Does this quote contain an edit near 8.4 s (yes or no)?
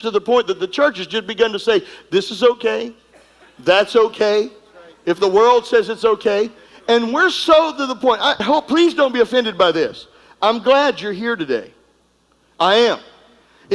yes